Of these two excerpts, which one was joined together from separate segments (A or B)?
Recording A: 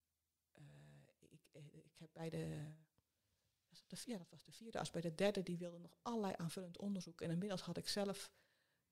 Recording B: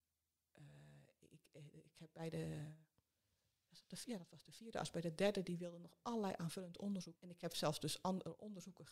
B